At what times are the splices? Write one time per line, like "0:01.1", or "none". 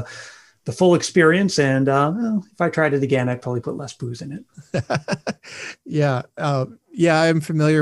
none